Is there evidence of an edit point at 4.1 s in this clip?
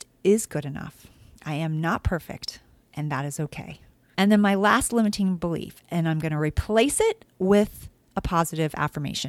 yes; 1 cut; at 4.1 s

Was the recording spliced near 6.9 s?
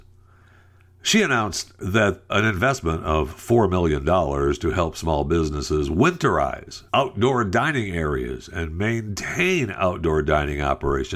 yes; 2 cuts; at 2.3 s, 6.9 s

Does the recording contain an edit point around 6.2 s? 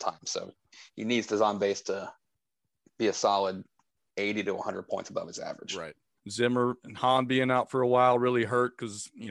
yes; 1 cut; at 6.2 s

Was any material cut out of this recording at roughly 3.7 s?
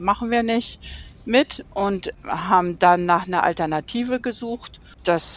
no; 0 cuts

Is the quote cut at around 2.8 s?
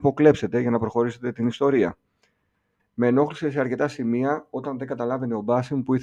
yes; 1 cut; at 2.8 s

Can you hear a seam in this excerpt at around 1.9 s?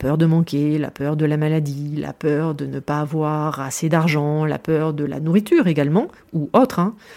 no; 0 cuts

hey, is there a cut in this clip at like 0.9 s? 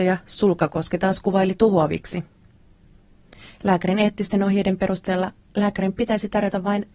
no; 1 cut; at 3.5 s

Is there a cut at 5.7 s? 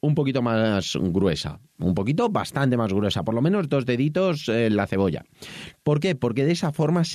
yes; 1 cut; at 5.7 s

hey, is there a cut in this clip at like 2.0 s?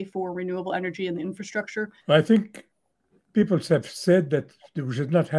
yes; 1 cut; at 2.0 s

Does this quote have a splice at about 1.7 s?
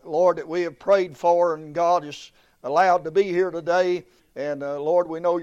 no; 1 cut; at 4.2 s

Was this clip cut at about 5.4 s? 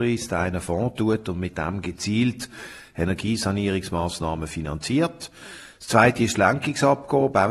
no; 0 cuts

